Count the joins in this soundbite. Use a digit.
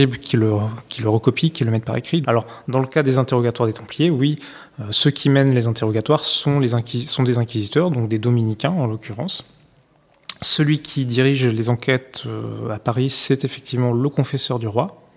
1